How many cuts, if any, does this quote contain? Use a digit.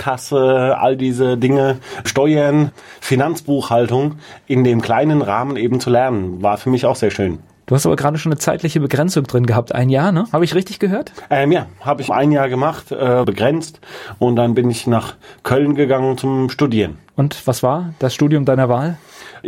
2